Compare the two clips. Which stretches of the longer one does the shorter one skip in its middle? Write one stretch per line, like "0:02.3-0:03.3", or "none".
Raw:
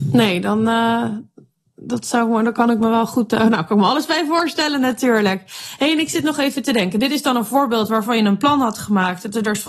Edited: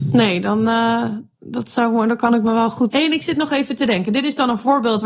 0:01.3-0:01.7
0:03.3-0:05.8